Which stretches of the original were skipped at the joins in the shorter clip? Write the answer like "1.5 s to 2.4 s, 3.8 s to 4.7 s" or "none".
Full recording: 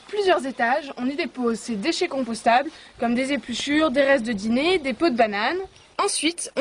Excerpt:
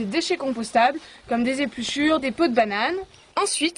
3.9 s to 4.8 s